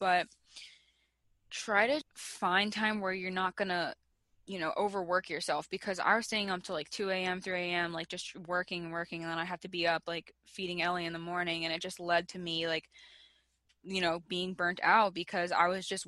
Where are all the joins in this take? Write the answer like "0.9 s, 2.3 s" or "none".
2.0 s